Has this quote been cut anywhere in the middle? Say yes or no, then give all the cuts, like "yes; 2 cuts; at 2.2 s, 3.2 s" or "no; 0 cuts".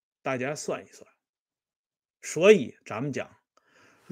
no; 0 cuts